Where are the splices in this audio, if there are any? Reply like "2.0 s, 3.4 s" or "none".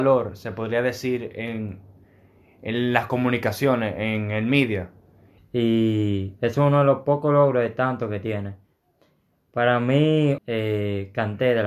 5.4 s, 10.4 s